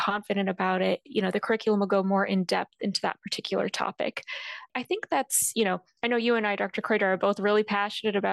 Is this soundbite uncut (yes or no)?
yes